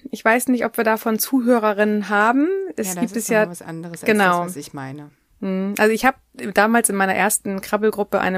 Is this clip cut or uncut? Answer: uncut